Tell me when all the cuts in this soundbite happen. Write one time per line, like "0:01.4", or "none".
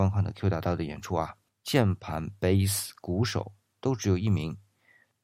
0:01.5